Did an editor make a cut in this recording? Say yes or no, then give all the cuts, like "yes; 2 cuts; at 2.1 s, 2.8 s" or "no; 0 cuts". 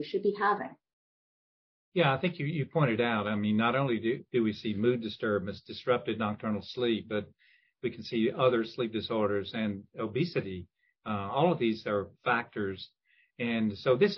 no; 0 cuts